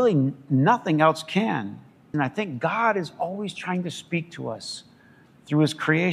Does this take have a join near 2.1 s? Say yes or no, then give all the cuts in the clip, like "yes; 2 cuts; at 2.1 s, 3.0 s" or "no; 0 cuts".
yes; 1 cut; at 2.1 s